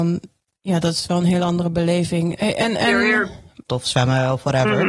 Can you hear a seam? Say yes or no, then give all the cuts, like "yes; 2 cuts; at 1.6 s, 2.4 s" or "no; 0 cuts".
yes; 2 cuts; at 2.4 s, 3.7 s